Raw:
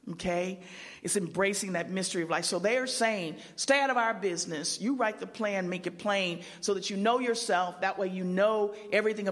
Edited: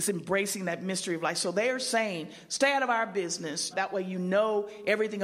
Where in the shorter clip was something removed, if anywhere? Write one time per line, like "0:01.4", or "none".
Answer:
0:03.7